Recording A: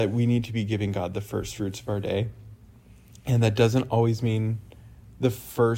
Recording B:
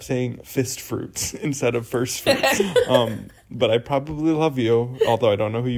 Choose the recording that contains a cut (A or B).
B